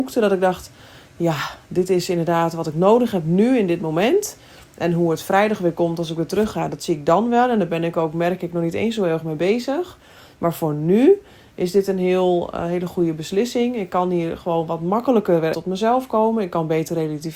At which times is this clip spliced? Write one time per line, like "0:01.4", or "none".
0:15.5